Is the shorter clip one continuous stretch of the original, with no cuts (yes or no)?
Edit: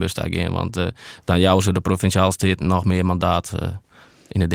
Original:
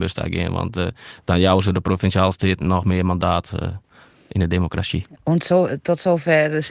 yes